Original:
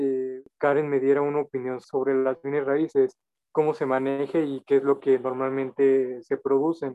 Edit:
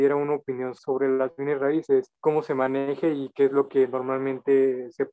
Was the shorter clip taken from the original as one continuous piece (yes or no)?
no